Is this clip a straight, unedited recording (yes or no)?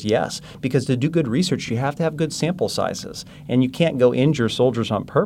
yes